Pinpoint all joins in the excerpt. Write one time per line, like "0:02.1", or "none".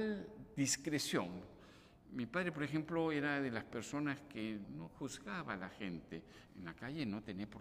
0:04.6
0:06.5